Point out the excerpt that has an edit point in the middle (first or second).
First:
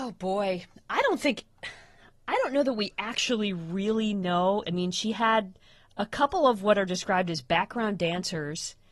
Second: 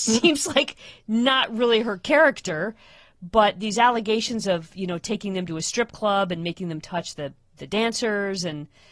first